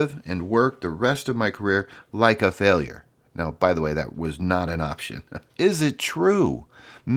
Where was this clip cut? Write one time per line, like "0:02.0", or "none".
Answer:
0:05.5